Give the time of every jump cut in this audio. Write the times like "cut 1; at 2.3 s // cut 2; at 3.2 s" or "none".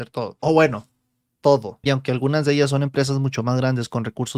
cut 1; at 1.8 s